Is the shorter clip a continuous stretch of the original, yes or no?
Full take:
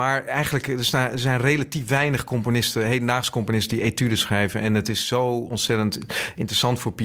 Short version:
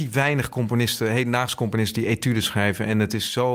yes